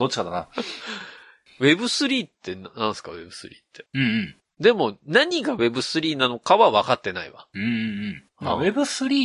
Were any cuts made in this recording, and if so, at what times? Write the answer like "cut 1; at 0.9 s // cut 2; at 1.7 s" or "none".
cut 1; at 3.9 s